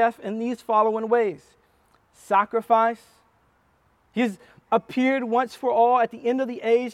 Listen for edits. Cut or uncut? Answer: uncut